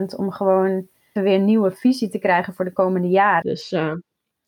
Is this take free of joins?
no; 2 cuts; at 1.2 s, 3.4 s

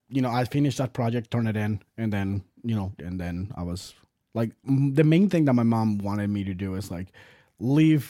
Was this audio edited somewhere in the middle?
yes; 1 cut; at 3.0 s

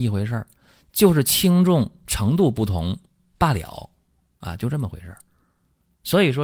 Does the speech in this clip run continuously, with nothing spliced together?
yes; 0 cuts

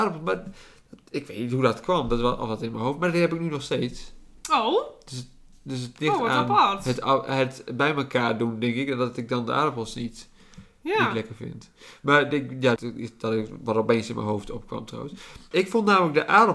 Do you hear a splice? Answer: yes; 2 cuts; at 12.8 s, 15.5 s

